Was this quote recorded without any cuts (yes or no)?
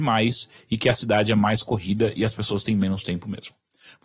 yes